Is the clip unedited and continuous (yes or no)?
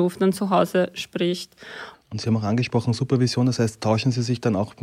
no